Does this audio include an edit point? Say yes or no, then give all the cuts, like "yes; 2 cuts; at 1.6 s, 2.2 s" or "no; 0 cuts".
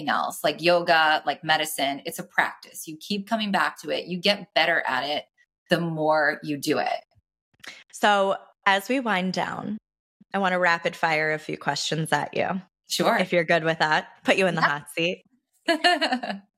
no; 0 cuts